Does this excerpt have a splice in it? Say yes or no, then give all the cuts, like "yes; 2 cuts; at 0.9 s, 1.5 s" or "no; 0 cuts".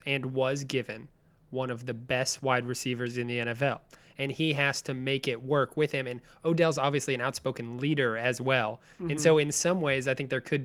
no; 0 cuts